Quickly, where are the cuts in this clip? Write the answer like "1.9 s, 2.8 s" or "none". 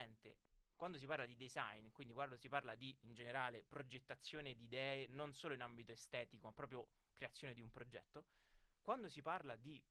none